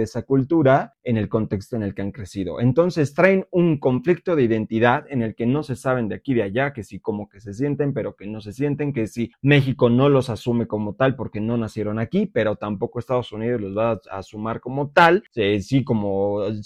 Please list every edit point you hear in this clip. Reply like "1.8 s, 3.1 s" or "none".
none